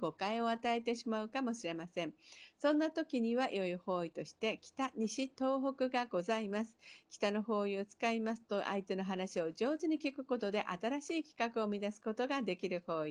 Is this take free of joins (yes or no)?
yes